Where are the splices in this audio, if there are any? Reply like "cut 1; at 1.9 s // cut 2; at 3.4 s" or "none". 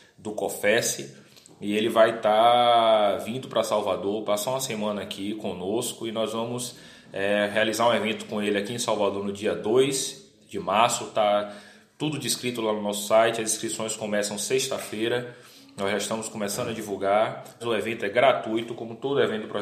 cut 1; at 17.6 s